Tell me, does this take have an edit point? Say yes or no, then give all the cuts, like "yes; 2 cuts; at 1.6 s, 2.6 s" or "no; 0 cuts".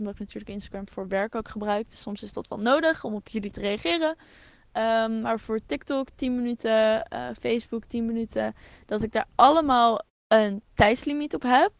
no; 0 cuts